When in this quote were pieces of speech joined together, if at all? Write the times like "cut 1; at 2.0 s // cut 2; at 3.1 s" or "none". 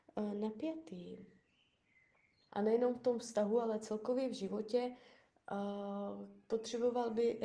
cut 1; at 2.5 s